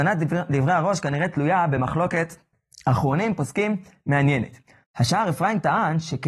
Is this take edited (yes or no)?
yes